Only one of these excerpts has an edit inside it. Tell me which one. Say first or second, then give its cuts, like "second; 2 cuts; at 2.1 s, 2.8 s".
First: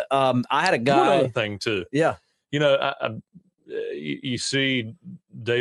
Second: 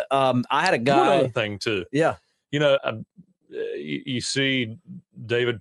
second; 1 cut; at 2.8 s